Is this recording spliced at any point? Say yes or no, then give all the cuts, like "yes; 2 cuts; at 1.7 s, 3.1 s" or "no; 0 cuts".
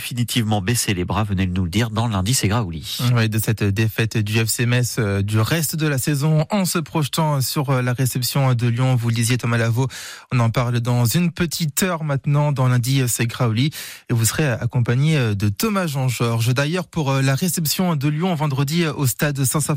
no; 0 cuts